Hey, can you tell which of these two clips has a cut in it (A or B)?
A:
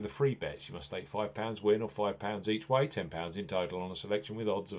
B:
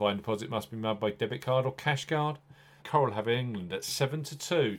B